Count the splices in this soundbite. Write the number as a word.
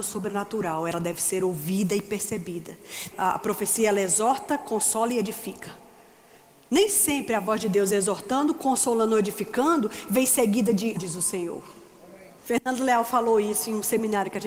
three